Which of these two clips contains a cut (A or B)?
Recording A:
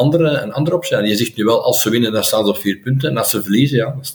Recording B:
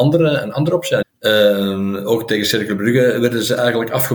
B